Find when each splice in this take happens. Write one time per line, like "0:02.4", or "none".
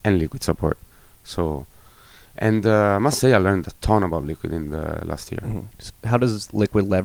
0:05.9